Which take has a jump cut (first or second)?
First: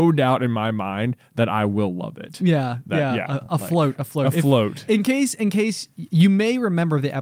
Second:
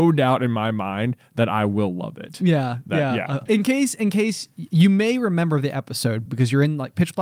second